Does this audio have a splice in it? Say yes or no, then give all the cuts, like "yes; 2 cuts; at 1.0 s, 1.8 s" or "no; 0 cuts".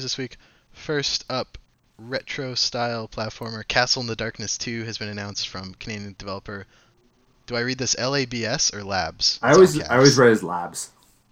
no; 0 cuts